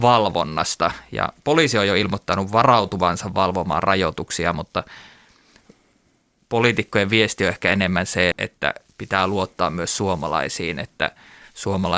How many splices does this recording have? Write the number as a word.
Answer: one